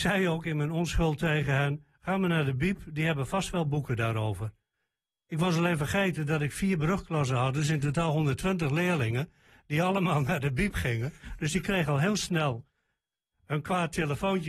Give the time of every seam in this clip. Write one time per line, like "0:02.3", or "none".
none